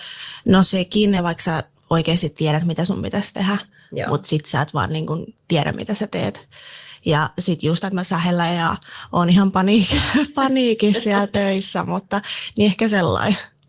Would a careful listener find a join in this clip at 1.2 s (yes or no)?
yes